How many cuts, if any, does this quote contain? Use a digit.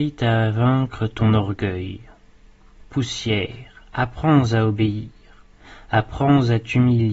0